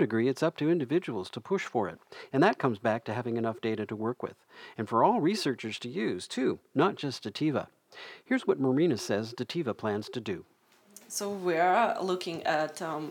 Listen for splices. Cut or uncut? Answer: cut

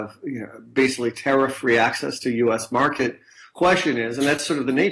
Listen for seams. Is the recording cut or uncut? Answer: cut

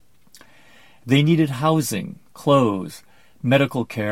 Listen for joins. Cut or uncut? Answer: cut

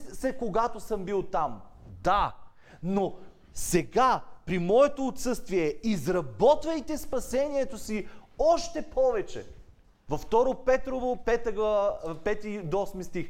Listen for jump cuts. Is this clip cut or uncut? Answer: cut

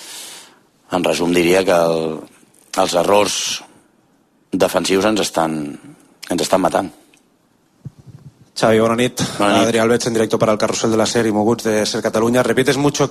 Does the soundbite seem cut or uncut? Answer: uncut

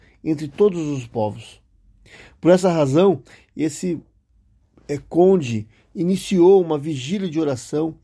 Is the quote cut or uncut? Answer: uncut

